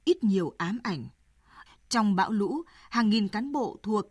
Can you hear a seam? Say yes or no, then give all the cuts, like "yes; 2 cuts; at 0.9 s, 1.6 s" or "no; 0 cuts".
yes; 1 cut; at 1.7 s